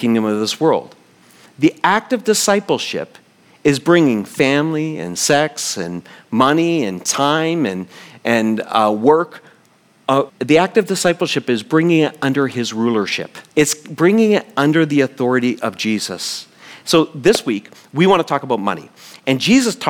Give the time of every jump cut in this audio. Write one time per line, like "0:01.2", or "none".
0:10.3
0:13.5